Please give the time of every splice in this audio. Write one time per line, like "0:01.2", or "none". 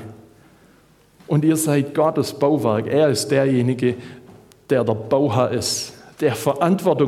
none